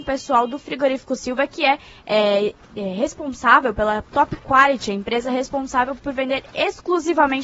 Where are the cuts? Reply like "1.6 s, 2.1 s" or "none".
none